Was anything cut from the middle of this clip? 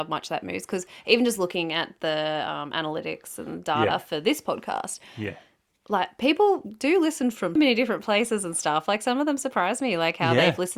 yes; 1 cut; at 7.6 s

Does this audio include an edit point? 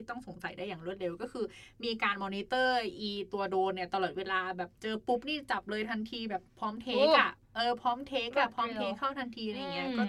yes; 1 cut; at 7.4 s

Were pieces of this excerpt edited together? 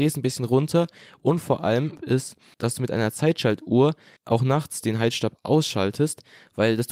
yes; 1 cut; at 2.0 s

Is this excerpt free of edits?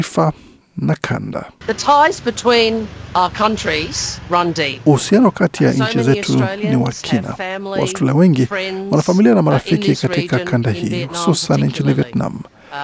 yes; 0 cuts

